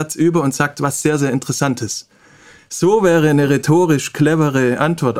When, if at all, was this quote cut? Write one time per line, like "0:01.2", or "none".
0:02.6